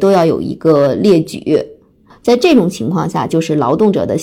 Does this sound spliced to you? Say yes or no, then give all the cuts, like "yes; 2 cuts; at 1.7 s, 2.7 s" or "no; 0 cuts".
yes; 1 cut; at 3.3 s